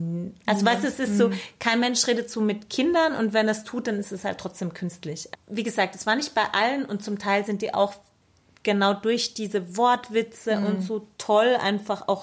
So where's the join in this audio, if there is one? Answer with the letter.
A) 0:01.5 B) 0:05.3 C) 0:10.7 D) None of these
B